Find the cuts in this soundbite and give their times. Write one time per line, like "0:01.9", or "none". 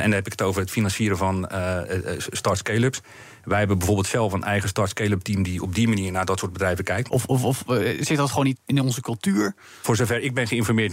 0:07.1
0:08.6